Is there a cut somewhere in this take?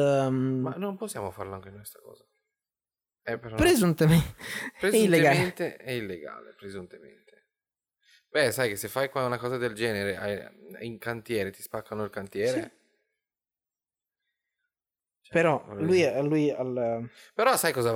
yes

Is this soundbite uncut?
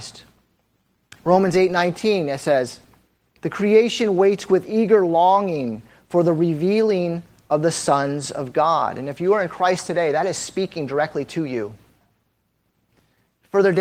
yes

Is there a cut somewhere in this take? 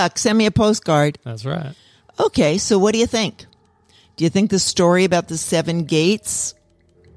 no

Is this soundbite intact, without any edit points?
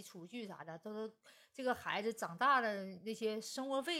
yes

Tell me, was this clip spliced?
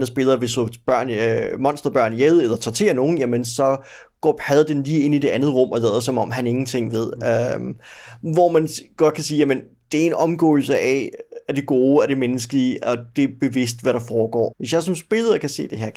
yes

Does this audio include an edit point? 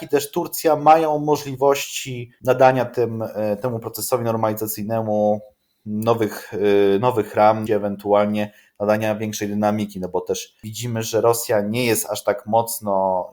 yes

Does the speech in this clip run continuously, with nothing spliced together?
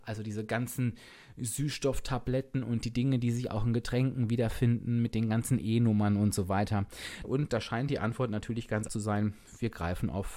no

